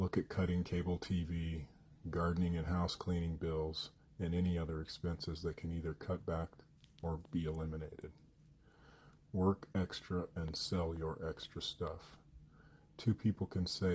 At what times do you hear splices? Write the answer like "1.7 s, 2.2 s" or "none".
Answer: 9.2 s